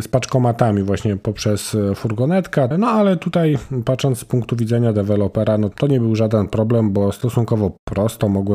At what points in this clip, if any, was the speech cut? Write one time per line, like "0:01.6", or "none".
0:02.7
0:05.7